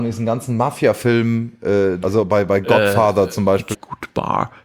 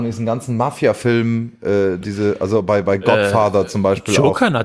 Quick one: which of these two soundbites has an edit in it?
first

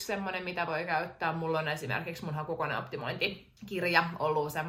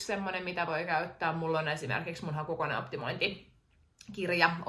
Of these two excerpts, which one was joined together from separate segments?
first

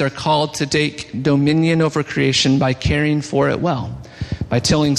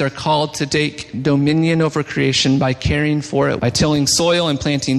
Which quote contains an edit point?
second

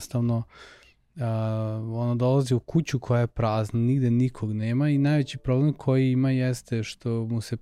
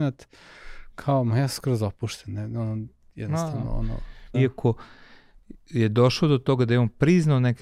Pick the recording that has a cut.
second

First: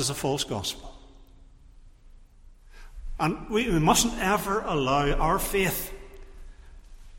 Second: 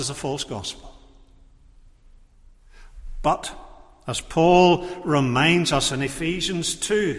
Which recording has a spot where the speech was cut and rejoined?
first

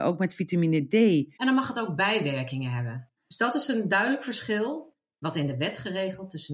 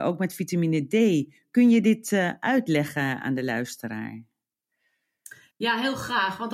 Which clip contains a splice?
first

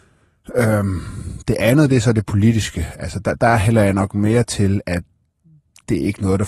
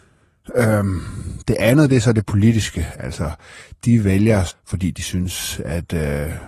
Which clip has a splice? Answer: second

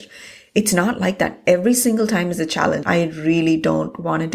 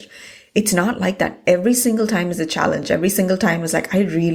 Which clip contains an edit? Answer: first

